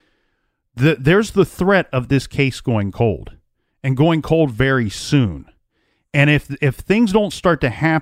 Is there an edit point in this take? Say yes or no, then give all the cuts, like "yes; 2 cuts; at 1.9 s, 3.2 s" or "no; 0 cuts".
no; 0 cuts